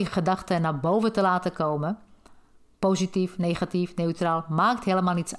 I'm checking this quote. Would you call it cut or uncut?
uncut